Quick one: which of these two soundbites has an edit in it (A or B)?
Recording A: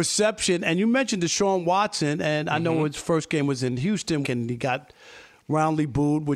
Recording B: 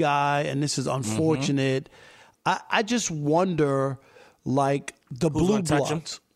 A